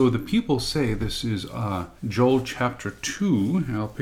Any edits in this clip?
yes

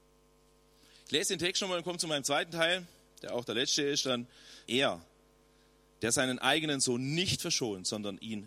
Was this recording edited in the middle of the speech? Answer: yes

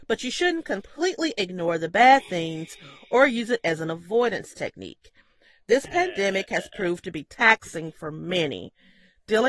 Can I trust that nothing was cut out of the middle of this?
yes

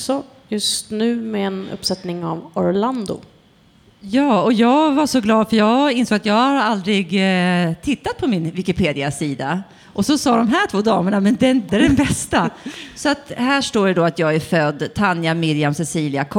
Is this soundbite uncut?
no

